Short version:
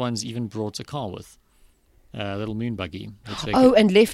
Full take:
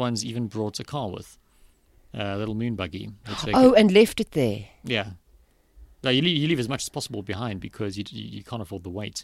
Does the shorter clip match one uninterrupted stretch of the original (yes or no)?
yes